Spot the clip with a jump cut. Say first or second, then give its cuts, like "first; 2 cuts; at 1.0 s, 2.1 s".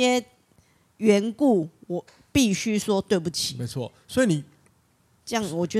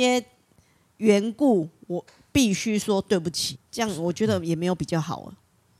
second; 1 cut; at 3.5 s